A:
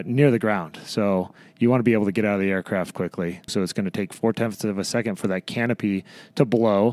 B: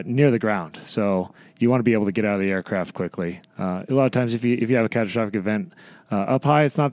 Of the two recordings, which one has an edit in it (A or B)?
A